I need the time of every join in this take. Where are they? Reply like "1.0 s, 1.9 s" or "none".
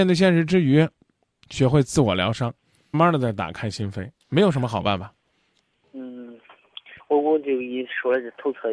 2.9 s, 4.2 s

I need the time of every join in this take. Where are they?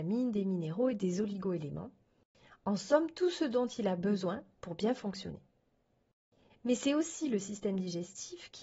none

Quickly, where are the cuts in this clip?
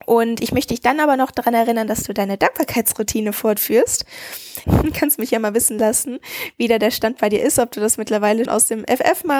4.6 s, 8.5 s

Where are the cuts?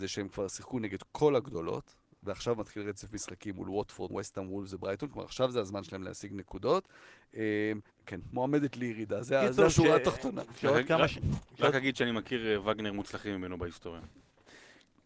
4.1 s, 7.9 s

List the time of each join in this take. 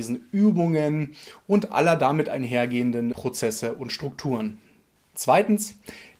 3.1 s, 4.9 s

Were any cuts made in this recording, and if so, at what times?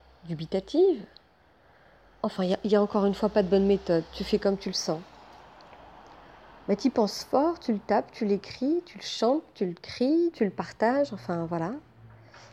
10.3 s

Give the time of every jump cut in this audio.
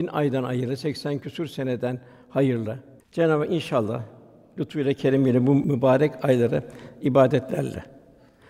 3.0 s

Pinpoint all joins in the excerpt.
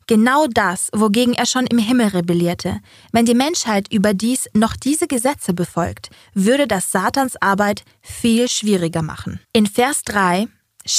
9.4 s

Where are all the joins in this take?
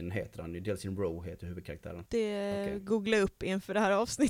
2.0 s

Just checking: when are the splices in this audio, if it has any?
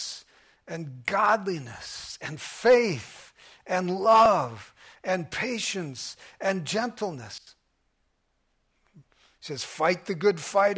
9.0 s

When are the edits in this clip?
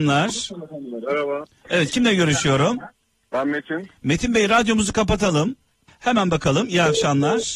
5.9 s

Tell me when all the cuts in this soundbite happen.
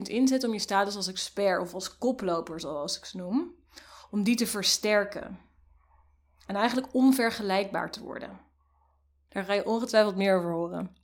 9.3 s

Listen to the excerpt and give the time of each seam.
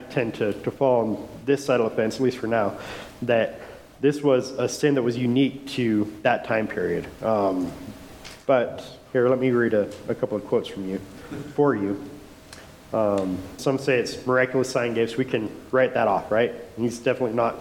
3.9 s, 7.2 s, 13.6 s

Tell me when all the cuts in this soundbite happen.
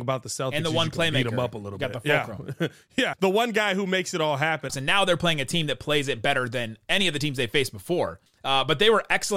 3.1 s, 4.7 s, 8.3 s

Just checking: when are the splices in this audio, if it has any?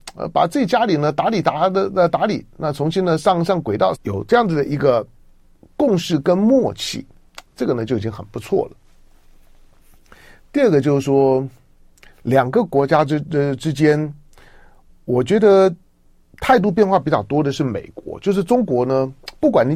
3.9 s

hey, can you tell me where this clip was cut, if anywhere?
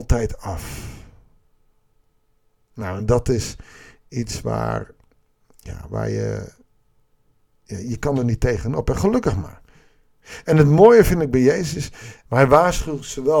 12.3 s

